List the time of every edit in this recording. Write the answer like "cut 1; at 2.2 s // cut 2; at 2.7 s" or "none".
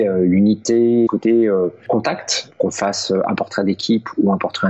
cut 1; at 1.1 s // cut 2; at 2.5 s